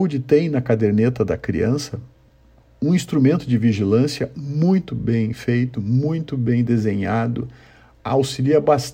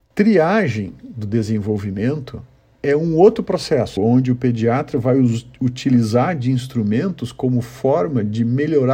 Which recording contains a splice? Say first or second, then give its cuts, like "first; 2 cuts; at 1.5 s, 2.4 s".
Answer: second; 1 cut; at 4.0 s